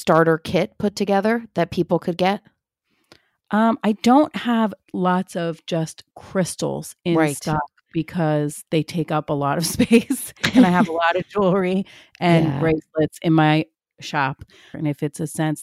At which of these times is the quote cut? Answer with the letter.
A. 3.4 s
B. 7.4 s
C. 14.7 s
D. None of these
C